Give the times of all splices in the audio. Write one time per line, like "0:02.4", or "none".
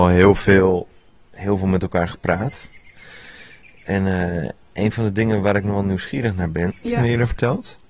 0:06.7